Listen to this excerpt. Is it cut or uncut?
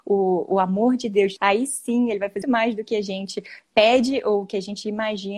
cut